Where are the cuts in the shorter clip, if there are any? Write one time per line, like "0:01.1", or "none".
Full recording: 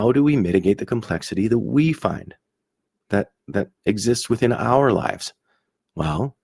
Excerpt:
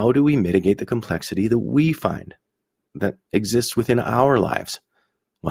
0:02.9